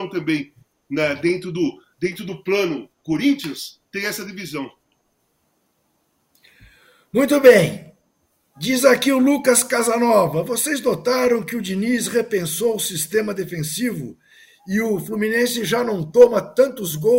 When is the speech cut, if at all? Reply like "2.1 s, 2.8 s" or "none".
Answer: none